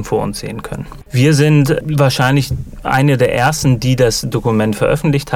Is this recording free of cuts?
no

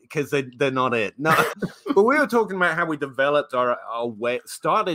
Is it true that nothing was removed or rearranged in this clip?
no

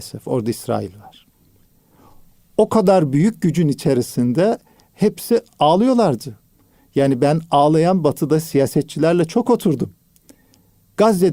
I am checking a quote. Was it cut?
no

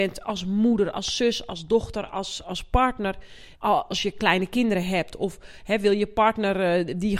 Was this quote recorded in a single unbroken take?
no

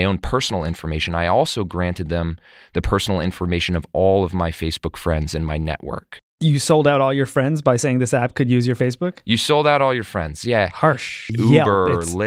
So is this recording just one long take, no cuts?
no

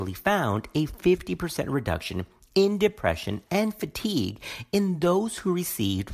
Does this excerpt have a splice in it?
yes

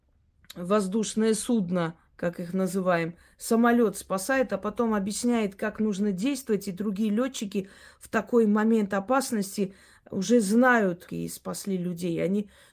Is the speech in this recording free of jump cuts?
no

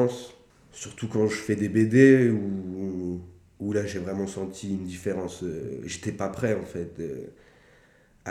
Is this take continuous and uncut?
yes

